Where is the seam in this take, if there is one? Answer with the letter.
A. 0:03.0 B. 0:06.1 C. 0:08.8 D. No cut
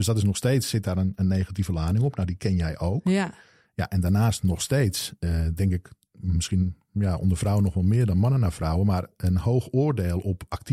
D